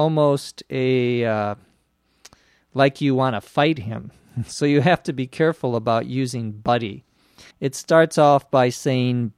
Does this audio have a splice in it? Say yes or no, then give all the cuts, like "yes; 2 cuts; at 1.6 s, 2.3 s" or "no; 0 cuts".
yes; 1 cut; at 7.5 s